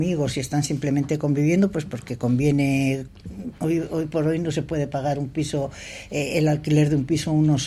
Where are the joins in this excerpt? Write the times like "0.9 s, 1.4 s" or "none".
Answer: none